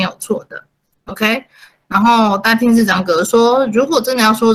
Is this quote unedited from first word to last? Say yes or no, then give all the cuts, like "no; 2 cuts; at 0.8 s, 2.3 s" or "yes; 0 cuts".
no; 1 cut; at 0.9 s